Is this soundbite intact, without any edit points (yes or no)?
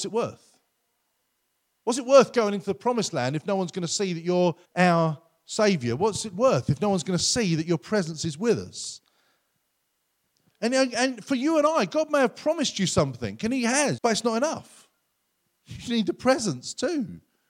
no